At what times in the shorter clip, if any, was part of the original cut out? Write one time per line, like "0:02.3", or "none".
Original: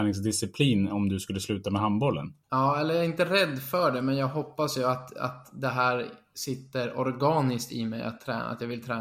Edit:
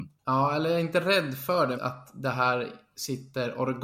0:01.7